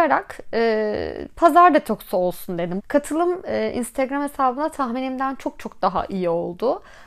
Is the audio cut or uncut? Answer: cut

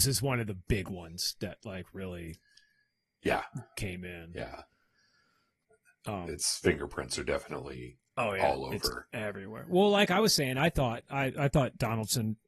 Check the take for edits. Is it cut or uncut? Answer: uncut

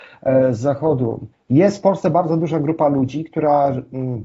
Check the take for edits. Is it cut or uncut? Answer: cut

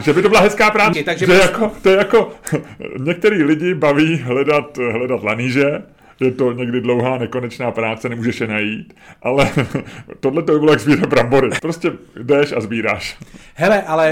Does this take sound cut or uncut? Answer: cut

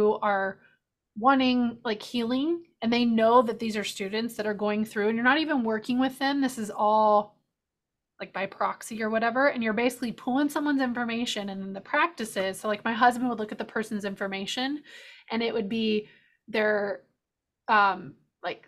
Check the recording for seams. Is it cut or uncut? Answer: uncut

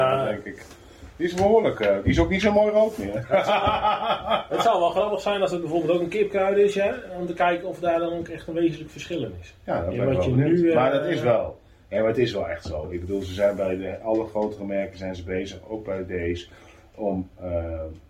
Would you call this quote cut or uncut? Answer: uncut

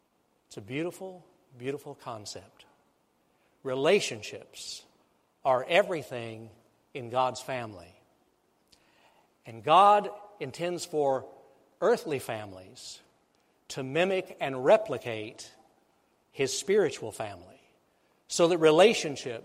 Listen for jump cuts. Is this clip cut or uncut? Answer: uncut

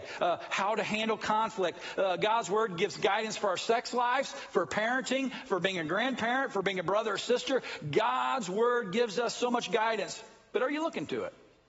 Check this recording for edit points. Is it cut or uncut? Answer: uncut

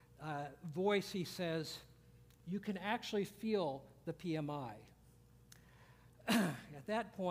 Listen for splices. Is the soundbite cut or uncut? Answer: uncut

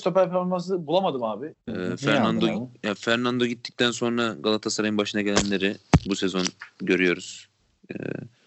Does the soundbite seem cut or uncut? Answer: cut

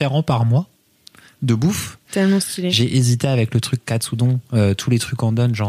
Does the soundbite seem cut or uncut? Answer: cut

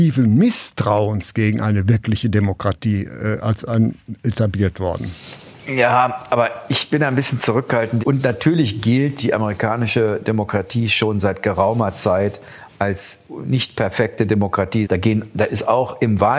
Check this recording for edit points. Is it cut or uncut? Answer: cut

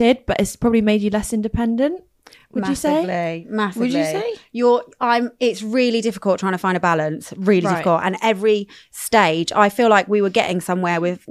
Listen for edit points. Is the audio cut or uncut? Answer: uncut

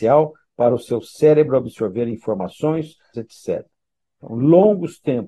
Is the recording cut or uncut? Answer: cut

